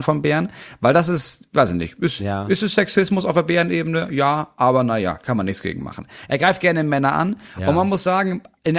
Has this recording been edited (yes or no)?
no